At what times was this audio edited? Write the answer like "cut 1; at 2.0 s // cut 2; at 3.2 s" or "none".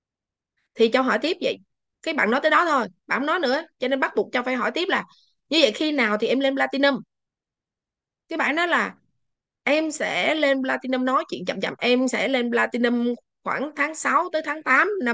cut 1; at 11.8 s